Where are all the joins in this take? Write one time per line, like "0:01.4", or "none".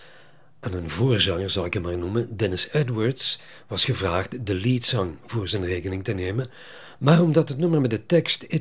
none